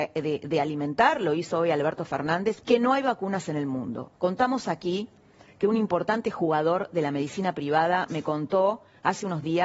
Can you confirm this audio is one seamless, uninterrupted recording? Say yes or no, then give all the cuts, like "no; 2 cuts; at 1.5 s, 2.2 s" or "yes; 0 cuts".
no; 2 cuts; at 2.6 s, 4.1 s